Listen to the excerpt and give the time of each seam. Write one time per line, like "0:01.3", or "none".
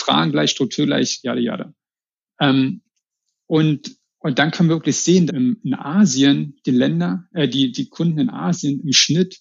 0:05.3